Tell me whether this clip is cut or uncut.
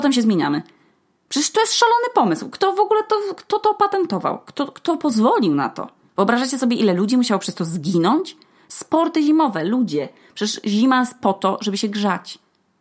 uncut